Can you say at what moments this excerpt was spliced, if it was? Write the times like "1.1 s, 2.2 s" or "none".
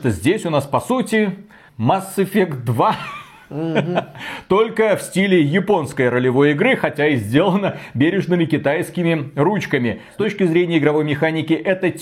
1.7 s